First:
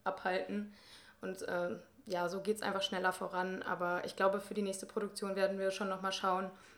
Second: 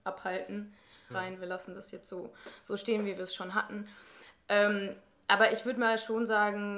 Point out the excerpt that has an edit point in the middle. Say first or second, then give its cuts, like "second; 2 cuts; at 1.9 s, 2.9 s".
second; 1 cut; at 1.1 s